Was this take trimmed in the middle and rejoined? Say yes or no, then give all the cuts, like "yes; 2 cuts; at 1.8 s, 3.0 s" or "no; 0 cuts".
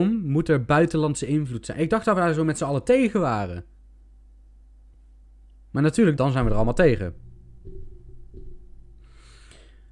yes; 1 cut; at 6.2 s